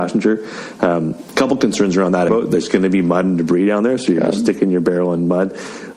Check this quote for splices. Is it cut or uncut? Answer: cut